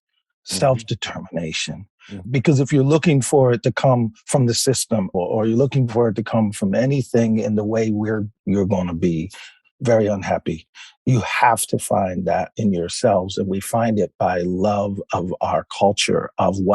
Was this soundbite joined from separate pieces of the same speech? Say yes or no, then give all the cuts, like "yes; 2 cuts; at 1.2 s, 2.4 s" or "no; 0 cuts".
yes; 3 cuts; at 2.2 s, 5.1 s, 8.4 s